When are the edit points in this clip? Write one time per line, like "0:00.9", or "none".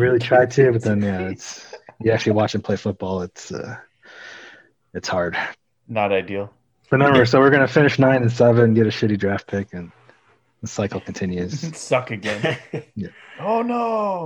none